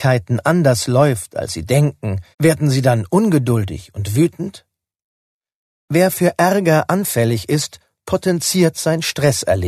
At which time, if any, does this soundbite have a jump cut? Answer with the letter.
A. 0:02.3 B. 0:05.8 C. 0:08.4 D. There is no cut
A